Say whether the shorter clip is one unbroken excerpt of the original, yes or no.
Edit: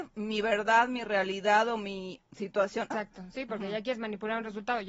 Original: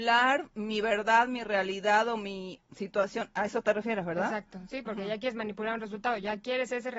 no